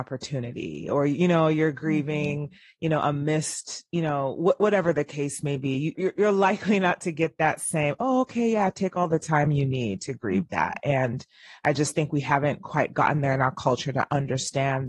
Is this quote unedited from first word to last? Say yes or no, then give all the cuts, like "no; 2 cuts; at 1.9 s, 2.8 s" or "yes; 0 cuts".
no; 1 cut; at 6.0 s